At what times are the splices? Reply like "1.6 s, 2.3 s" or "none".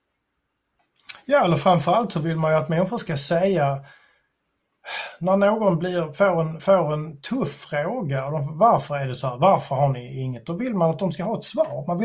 none